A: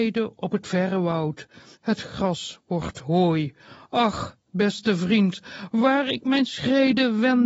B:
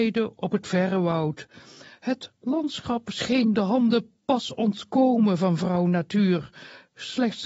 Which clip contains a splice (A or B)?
A